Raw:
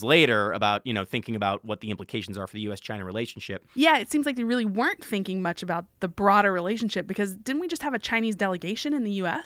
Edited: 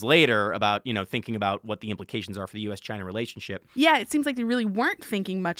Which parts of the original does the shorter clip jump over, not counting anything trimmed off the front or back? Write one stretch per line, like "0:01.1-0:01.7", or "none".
none